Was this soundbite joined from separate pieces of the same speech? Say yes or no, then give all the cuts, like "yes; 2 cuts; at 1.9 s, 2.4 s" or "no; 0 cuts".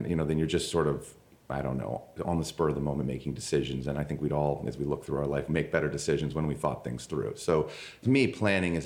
no; 0 cuts